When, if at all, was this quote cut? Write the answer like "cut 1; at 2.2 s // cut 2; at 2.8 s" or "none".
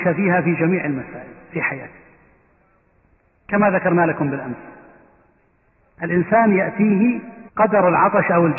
cut 1; at 7.5 s